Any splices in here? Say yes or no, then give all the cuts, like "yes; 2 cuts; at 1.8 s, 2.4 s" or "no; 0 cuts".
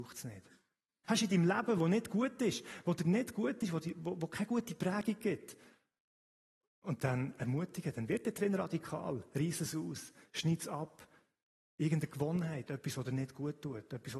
yes; 1 cut; at 1.0 s